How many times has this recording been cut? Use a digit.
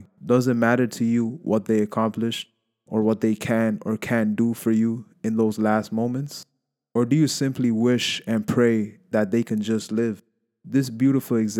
0